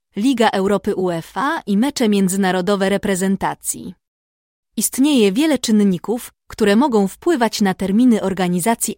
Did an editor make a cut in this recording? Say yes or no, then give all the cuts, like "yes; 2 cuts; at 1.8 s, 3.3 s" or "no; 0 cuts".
yes; 1 cut; at 4.6 s